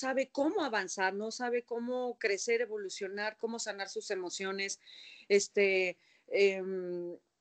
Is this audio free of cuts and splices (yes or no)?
no